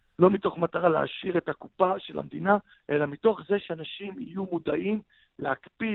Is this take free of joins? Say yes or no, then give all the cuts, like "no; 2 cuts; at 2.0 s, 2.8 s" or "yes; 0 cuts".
no; 1 cut; at 2.7 s